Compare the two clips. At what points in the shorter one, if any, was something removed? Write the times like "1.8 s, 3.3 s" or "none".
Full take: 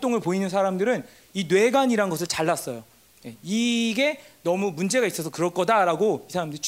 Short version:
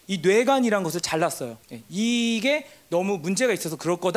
1.6 s